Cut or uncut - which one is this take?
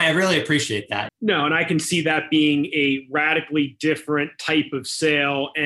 cut